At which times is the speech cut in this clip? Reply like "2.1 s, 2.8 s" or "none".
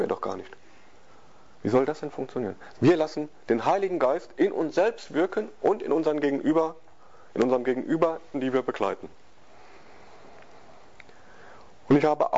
2.7 s, 8.3 s